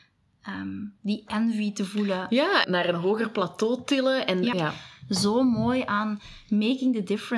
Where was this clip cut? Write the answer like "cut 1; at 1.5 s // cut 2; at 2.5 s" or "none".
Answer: cut 1; at 2.6 s // cut 2; at 4.5 s